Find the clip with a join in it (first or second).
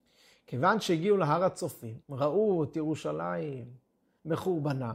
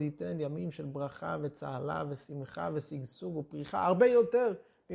first